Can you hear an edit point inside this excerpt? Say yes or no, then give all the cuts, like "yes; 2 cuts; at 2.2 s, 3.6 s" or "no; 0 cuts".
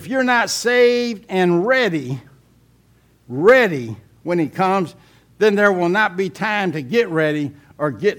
no; 0 cuts